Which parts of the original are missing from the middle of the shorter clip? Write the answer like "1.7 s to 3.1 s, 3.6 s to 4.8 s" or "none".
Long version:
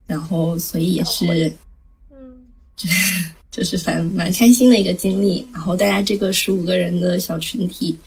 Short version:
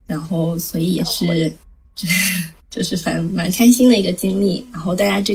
1.9 s to 2.7 s